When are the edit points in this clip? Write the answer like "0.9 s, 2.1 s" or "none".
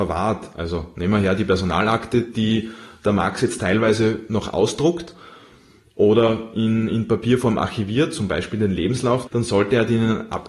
9.3 s